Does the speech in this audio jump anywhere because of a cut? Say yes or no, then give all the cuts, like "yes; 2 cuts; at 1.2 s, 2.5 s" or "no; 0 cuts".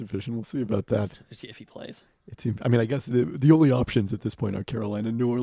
no; 0 cuts